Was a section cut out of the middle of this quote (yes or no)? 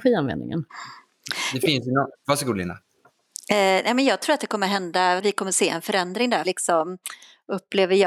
yes